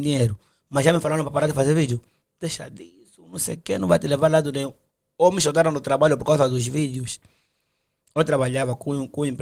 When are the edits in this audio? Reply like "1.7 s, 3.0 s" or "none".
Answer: none